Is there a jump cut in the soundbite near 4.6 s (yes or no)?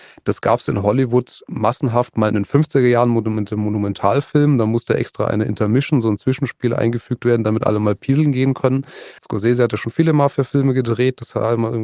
no